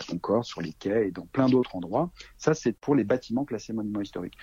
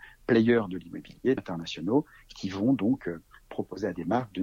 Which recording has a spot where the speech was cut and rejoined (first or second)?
second